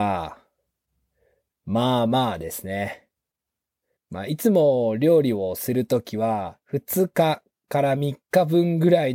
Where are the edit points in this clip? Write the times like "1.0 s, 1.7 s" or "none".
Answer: 4.0 s, 6.6 s